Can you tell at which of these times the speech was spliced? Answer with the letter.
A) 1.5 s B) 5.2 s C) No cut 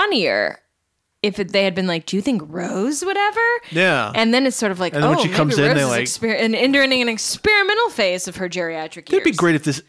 C